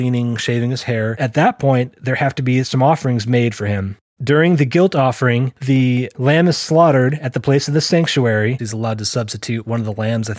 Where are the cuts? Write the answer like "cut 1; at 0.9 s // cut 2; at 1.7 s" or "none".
cut 1; at 1.1 s // cut 2; at 4.2 s // cut 3; at 8.6 s